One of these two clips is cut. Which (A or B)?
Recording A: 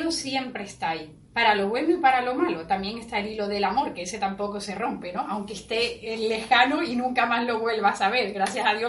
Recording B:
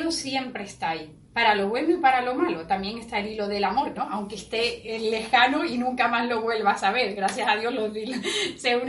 B